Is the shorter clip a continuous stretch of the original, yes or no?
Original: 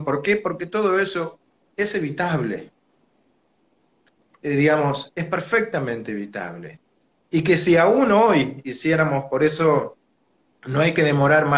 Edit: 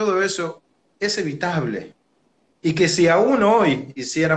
no